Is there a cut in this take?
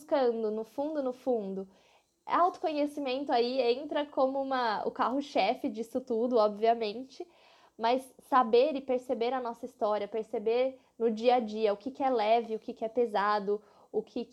no; 0 cuts

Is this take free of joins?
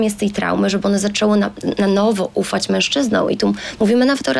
yes; 0 cuts

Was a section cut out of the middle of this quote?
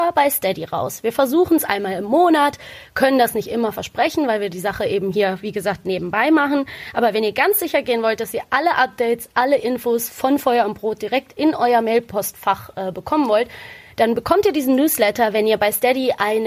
no; 0 cuts

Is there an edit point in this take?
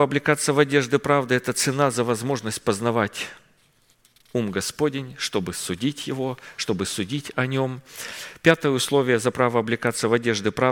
no; 0 cuts

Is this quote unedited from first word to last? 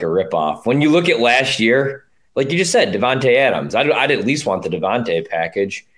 no; 1 cut; at 2.3 s

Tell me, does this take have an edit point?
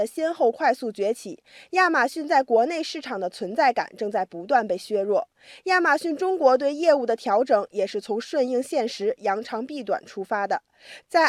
no; 0 cuts

